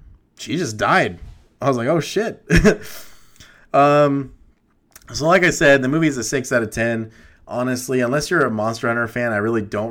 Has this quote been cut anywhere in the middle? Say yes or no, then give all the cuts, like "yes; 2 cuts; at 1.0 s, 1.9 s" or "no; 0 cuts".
no; 0 cuts